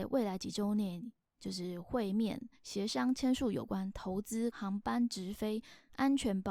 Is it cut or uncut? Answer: cut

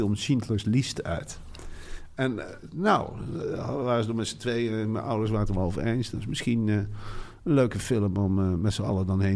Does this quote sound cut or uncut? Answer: uncut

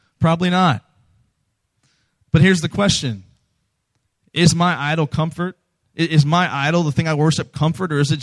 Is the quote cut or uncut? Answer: uncut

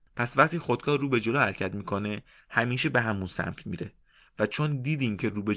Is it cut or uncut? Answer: uncut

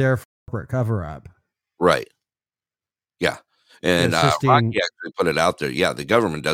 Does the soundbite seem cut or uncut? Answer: uncut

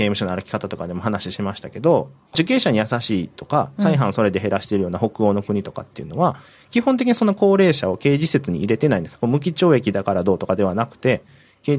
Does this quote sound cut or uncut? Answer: uncut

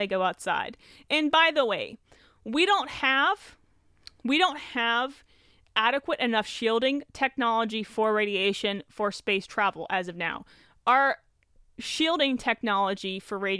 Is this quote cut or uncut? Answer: uncut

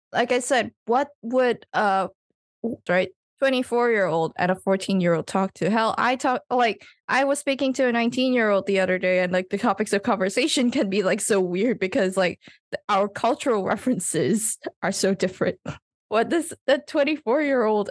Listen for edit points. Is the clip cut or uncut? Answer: cut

